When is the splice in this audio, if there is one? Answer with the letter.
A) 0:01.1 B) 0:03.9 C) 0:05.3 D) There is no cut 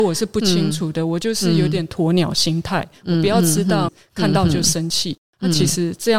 B